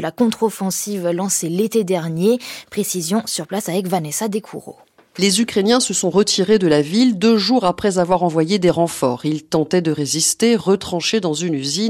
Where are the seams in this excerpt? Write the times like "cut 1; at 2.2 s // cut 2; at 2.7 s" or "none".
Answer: none